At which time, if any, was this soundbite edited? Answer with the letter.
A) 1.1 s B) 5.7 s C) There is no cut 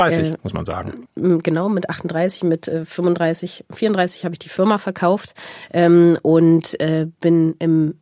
A